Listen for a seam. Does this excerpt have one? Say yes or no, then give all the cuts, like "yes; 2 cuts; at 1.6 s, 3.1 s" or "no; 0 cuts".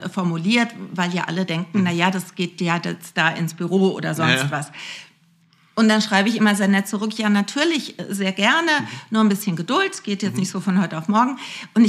no; 0 cuts